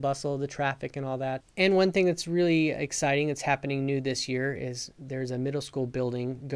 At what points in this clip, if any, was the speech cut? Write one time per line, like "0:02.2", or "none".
0:01.4